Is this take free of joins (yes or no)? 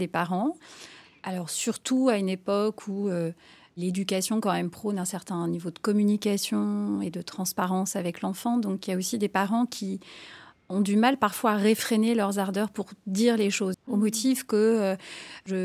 no